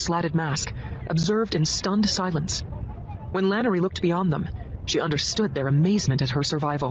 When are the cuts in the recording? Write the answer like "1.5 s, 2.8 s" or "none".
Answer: none